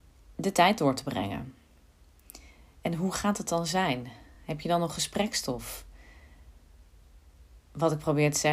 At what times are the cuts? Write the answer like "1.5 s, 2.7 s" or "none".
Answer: none